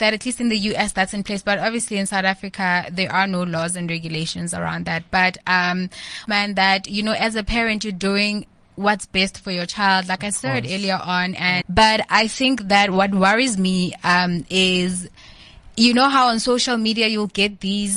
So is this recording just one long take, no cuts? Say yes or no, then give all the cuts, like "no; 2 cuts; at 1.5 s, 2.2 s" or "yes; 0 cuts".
no; 2 cuts; at 6.3 s, 11.6 s